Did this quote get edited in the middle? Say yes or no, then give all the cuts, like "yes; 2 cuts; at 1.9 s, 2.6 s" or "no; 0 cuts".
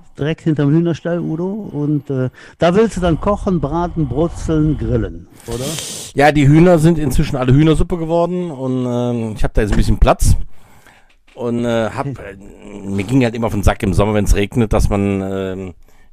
no; 0 cuts